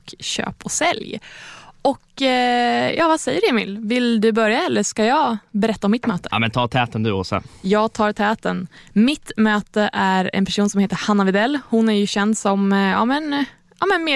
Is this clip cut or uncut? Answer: uncut